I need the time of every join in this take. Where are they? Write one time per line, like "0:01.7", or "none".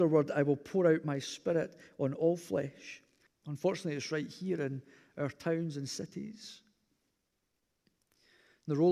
0:03.3

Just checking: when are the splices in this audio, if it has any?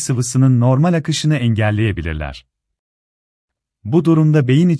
none

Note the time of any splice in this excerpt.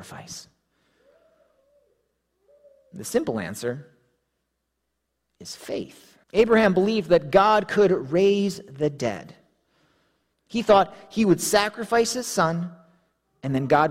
0:06.2
0:10.3

